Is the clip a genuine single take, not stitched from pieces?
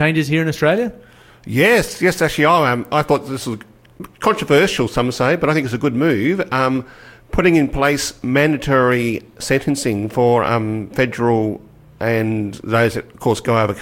yes; 0 cuts

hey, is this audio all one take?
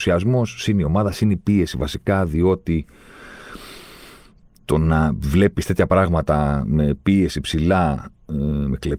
yes; 0 cuts

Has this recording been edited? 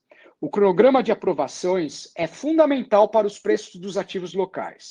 no; 0 cuts

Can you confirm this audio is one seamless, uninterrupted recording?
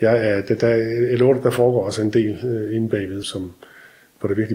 no; 1 cut; at 3.2 s

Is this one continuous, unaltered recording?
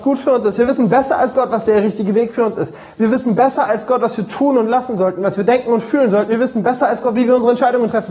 yes; 0 cuts

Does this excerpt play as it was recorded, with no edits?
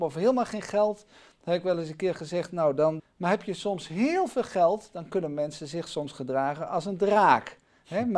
no; 1 cut; at 3.0 s

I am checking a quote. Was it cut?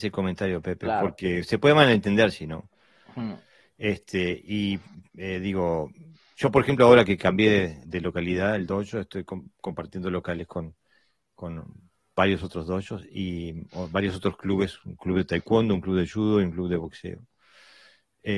no; 0 cuts

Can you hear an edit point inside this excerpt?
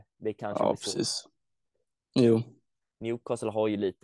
no; 0 cuts

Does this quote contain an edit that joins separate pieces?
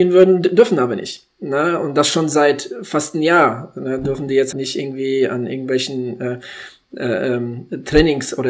yes; 1 cut; at 4.5 s

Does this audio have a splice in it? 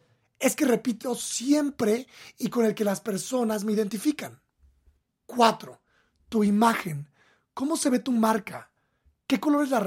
yes; 1 cut; at 5.1 s

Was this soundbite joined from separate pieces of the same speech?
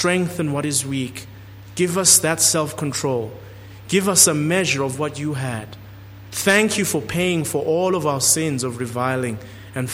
no; 0 cuts

